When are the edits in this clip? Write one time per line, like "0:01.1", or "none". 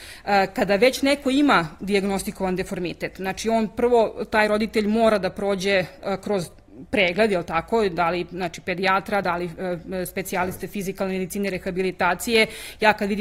none